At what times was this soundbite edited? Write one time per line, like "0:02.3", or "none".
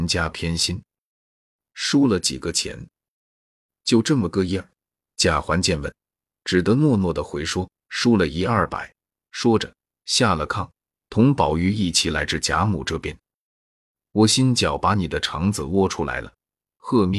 0:09.0
0:14.1